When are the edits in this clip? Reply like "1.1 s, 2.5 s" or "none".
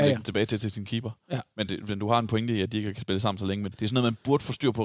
3.7 s

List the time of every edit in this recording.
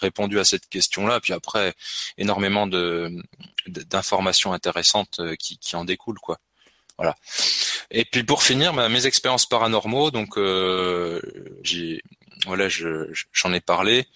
11.6 s

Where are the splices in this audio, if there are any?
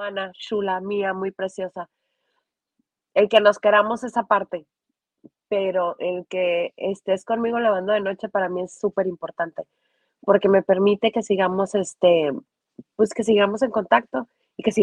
none

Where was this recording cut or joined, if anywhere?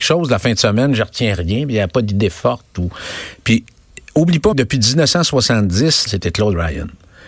4.5 s, 6.1 s

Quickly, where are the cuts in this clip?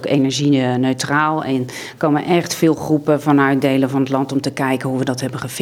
none

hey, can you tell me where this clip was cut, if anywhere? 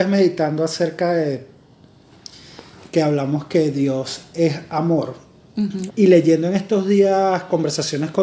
5.9 s

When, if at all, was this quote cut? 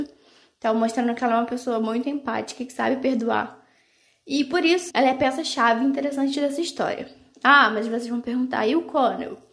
4.9 s

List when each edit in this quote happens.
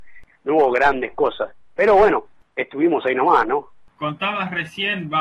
none

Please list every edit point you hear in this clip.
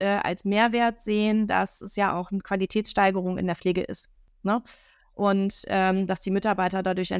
none

